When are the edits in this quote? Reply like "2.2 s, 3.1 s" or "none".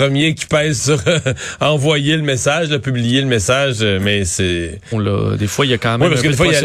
4.9 s